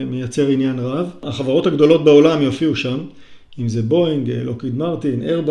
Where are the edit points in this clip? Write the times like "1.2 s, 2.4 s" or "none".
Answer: none